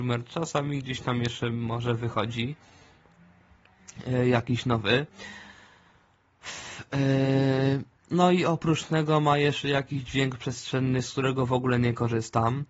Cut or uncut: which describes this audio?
uncut